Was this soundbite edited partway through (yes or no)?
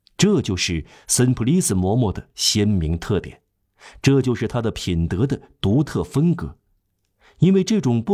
no